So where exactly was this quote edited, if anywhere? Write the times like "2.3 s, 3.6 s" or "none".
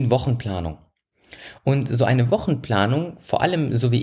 none

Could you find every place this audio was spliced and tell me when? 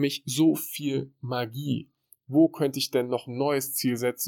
2.2 s

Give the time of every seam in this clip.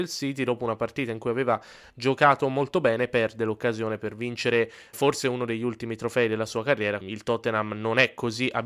4.9 s, 7.0 s

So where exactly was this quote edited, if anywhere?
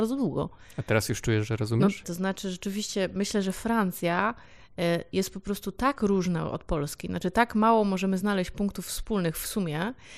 2.0 s

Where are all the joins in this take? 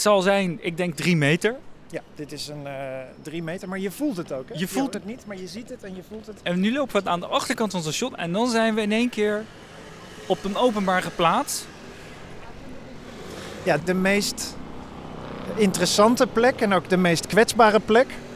4.9 s, 13.8 s

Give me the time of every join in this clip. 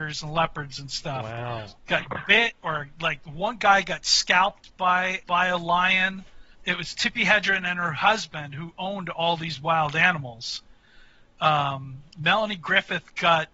1.8 s, 5.2 s, 6.5 s

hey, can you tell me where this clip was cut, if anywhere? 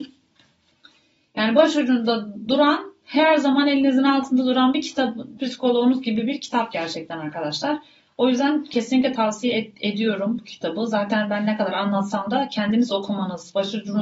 5.4 s

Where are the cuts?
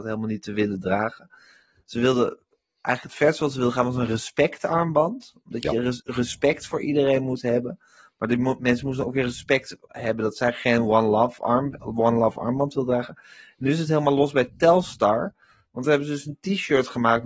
none

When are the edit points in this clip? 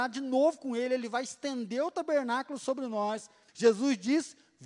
3.5 s

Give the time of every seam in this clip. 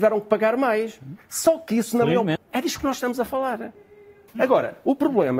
2.4 s, 4.3 s

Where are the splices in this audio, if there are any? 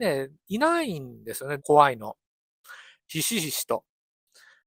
1.6 s, 3.0 s

